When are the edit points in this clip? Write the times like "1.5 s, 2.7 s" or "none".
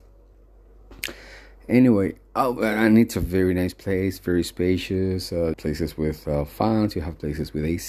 5.5 s